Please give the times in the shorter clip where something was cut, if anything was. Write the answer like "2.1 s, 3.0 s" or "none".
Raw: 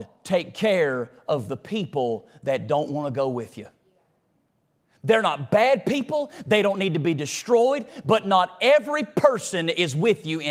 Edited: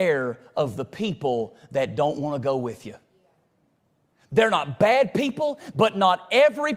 5.7 s

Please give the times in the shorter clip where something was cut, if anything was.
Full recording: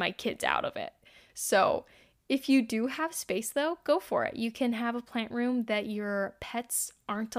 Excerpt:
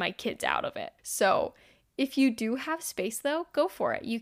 1.0 s

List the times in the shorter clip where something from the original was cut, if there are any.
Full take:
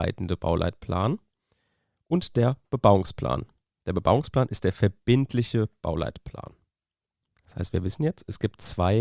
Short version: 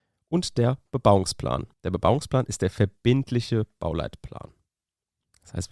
1.7 s

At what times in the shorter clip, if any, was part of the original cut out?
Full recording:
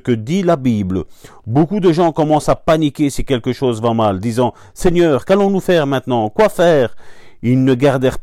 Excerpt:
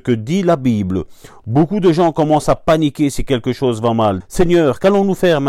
4.2 s

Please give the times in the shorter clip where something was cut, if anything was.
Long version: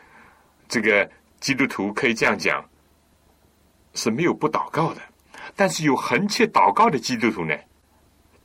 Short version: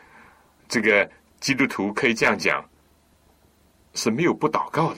none

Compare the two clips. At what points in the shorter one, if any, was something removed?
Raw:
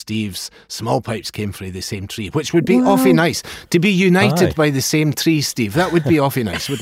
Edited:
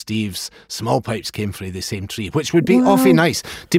none

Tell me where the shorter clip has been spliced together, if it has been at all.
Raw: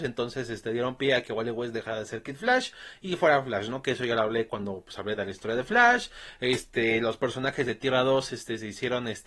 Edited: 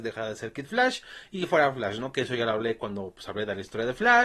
none

